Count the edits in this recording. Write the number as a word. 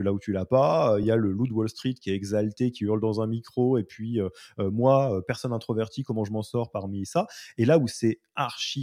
zero